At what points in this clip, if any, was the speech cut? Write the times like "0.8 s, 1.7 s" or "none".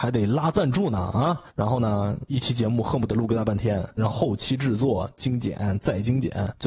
1.5 s, 4.1 s